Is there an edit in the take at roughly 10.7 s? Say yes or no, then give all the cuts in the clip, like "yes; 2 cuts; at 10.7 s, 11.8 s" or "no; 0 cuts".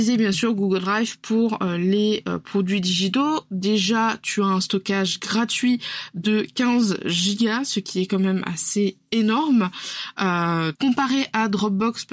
yes; 1 cut; at 10.7 s